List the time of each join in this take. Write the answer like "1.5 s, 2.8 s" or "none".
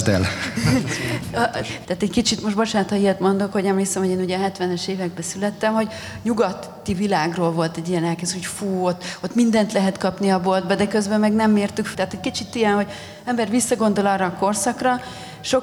1.8 s, 11.9 s